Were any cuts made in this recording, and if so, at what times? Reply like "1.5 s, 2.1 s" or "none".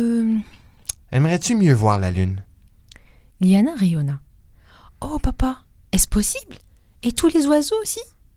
1.0 s